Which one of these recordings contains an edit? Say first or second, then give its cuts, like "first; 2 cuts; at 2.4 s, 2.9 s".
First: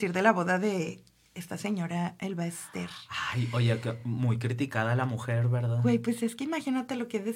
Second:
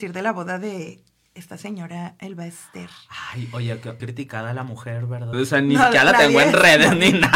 second; 2 cuts; at 4.0 s, 5.3 s